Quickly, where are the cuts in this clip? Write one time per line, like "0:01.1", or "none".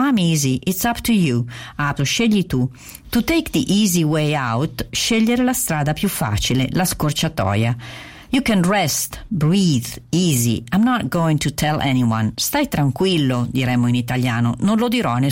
0:02.0